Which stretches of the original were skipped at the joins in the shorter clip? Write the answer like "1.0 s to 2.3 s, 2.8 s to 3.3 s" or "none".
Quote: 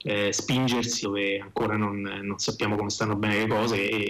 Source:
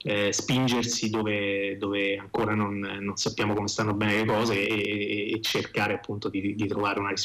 1.0 s to 1.8 s